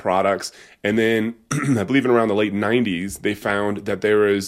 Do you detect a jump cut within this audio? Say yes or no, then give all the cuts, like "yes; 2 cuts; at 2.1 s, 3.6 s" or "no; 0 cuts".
no; 0 cuts